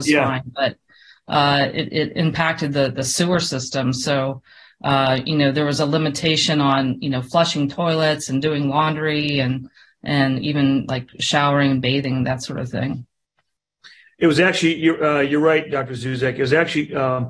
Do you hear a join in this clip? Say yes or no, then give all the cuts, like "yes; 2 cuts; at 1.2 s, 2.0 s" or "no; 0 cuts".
no; 0 cuts